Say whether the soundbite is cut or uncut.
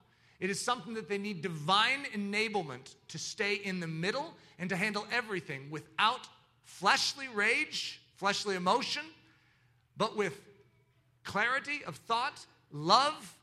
uncut